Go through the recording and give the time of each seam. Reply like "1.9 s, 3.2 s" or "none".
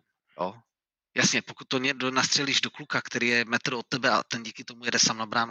none